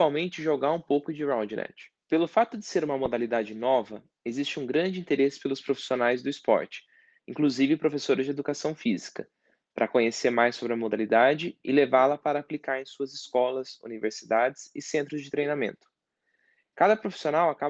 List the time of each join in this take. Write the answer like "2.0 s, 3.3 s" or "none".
2.0 s